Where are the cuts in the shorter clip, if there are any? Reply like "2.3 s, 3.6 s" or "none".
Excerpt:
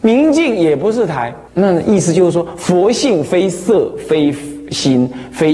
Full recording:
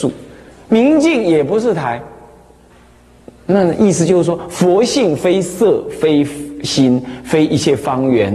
1.5 s